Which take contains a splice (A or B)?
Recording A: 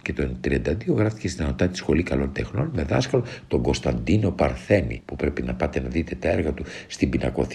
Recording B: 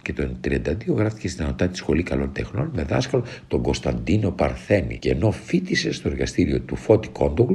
B